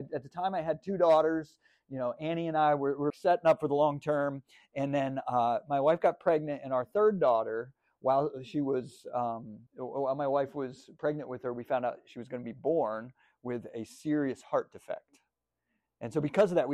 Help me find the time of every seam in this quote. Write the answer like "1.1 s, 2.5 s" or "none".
3.1 s, 9.7 s